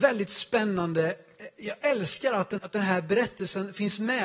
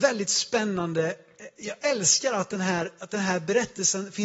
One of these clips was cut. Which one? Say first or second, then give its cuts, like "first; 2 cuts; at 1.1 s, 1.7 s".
first; 1 cut; at 2.6 s